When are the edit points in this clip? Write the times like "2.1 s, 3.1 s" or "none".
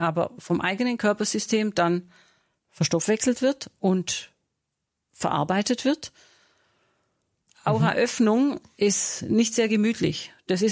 7.5 s